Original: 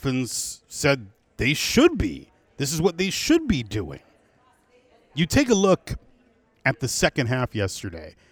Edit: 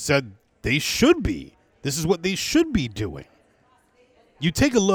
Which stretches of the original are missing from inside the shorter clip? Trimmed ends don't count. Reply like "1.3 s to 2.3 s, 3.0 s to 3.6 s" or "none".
none